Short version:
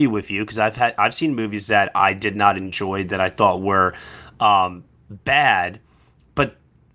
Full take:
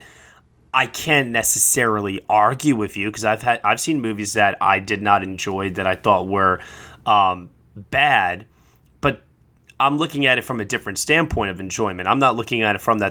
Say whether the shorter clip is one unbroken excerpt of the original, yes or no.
yes